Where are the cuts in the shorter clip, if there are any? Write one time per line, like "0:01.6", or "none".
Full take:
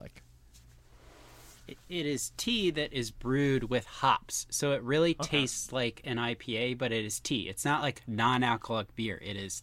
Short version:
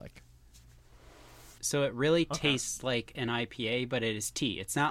0:01.6